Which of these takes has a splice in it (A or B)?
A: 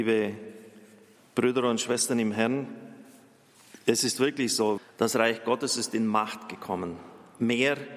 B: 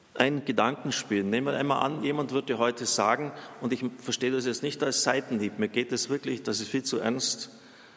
A